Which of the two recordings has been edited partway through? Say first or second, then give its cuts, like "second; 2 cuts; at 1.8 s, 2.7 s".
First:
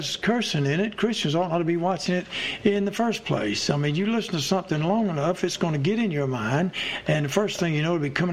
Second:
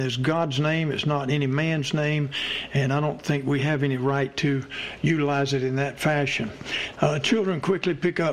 second; 1 cut; at 6.9 s